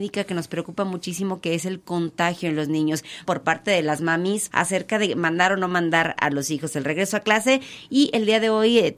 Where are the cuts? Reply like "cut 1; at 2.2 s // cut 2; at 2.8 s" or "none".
cut 1; at 3.3 s // cut 2; at 4.5 s